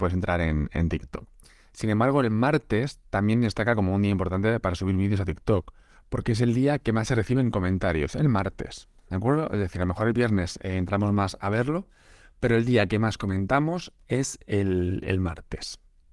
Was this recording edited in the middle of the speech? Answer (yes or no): no